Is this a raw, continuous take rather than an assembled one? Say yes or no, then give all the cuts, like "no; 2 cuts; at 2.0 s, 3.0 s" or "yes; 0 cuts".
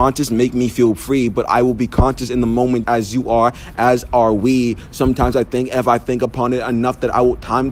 no; 1 cut; at 2.8 s